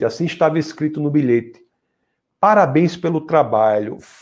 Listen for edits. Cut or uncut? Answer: uncut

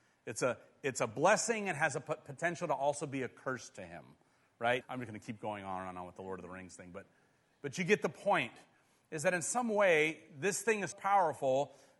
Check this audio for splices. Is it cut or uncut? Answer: cut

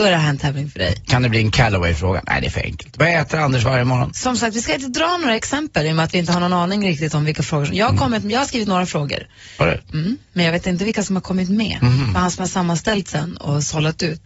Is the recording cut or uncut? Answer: uncut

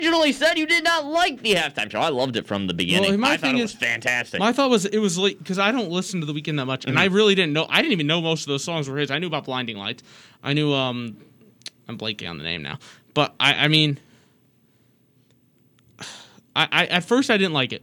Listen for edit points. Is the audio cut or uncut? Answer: uncut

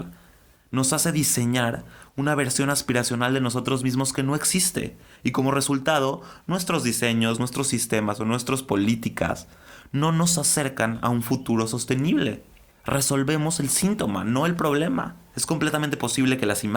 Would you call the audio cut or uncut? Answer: cut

